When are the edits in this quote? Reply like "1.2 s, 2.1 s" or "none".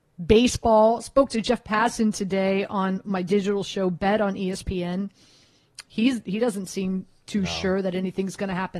5.9 s